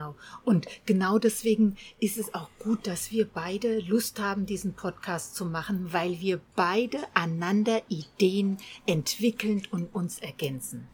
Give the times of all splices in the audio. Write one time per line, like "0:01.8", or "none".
none